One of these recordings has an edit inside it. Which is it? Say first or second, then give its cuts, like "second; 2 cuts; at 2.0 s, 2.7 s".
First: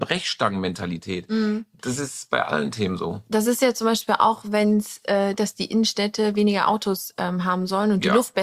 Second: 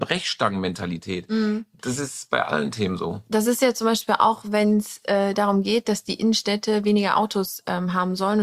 first; 1 cut; at 5.3 s